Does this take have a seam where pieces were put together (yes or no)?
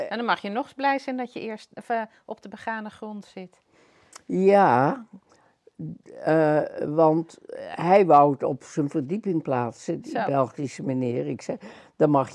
no